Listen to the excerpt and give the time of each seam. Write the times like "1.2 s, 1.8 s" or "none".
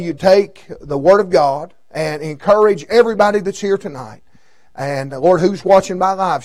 none